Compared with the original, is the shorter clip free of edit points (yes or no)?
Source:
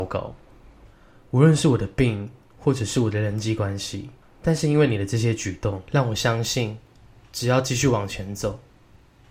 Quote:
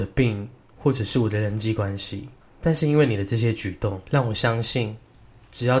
yes